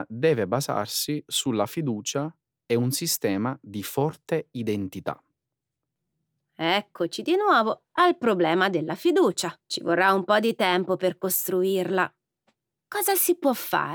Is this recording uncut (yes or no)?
no